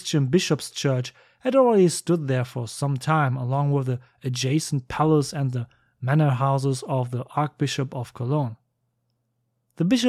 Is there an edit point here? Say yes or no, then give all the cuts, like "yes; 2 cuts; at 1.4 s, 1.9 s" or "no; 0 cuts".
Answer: no; 0 cuts